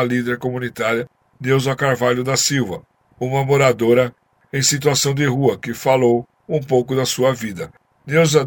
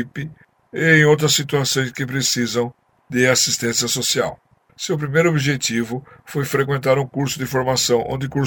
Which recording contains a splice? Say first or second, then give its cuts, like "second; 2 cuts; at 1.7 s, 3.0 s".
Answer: second; 1 cut; at 4.7 s